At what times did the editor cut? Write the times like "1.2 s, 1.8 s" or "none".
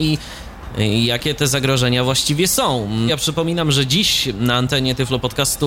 3.1 s